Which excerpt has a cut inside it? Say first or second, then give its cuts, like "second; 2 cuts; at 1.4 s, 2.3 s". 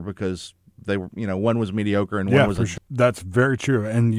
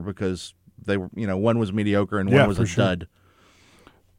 first; 1 cut; at 2.8 s